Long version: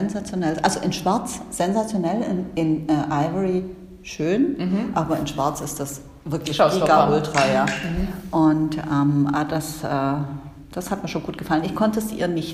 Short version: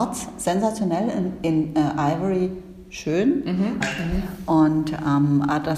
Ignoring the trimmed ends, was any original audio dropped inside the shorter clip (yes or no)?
yes